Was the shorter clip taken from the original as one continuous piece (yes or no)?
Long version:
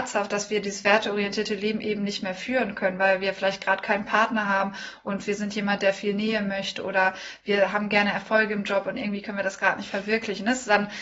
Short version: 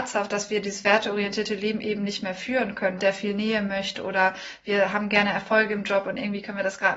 no